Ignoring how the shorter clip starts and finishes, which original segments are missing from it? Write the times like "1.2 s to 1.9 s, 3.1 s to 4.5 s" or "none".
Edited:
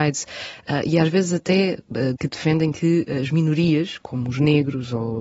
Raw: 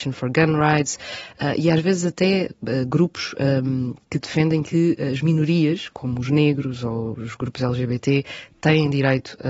2.9 s to 4.1 s